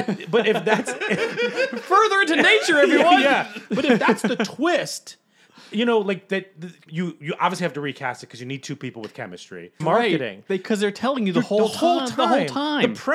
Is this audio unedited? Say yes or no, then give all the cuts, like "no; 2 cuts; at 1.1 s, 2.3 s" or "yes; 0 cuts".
no; 2 cuts; at 6.9 s, 9.8 s